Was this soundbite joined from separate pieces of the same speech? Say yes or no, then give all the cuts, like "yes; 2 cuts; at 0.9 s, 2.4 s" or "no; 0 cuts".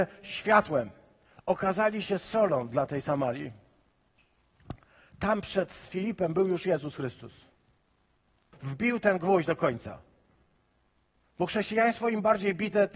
yes; 1 cut; at 8.5 s